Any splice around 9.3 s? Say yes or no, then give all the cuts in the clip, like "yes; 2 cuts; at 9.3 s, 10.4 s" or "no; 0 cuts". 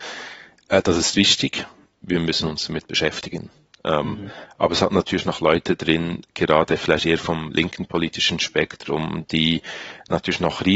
no; 0 cuts